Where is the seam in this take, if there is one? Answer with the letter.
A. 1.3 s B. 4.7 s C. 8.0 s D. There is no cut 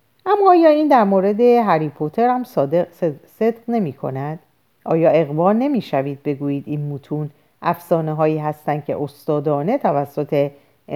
B